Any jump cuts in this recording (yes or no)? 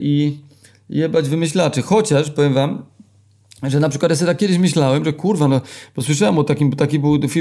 no